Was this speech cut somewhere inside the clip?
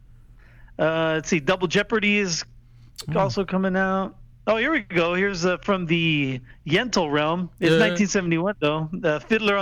no; 0 cuts

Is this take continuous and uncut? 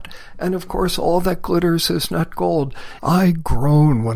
no; 1 cut; at 3.0 s

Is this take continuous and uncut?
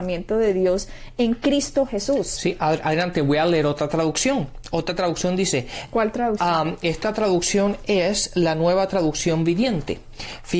yes; 0 cuts

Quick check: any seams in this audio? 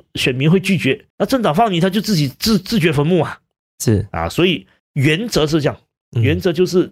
no; 0 cuts

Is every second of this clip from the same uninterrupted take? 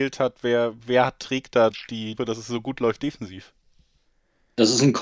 no; 1 cut; at 2.2 s

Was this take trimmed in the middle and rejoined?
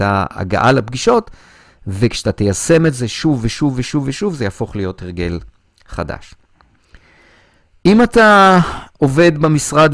no; 0 cuts

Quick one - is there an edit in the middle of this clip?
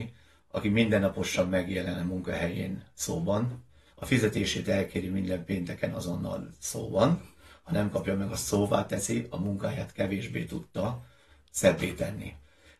yes; 1 cut; at 3.9 s

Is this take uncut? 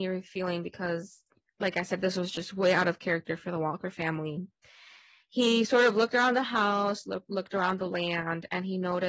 yes; 0 cuts

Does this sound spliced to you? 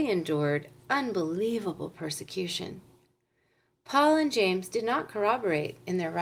no; 0 cuts

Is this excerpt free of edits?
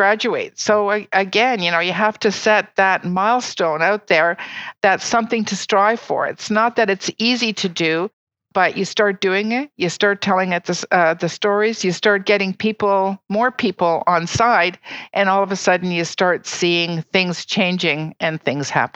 yes; 0 cuts

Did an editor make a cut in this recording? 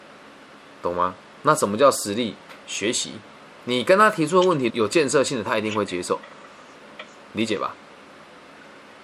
yes; 1 cut; at 4.7 s

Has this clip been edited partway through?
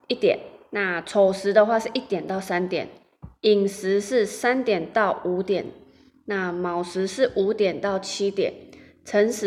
no; 0 cuts

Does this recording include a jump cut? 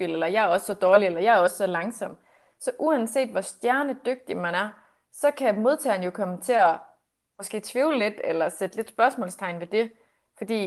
no; 0 cuts

